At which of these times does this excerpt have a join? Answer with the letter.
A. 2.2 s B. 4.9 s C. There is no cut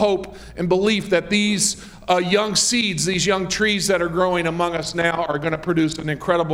C